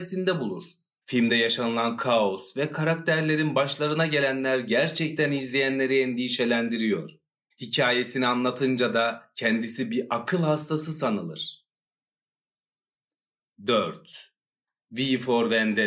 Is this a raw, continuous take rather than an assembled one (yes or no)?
no